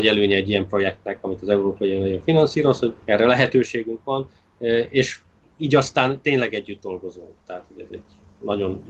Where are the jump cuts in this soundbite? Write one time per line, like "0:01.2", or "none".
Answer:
0:03.0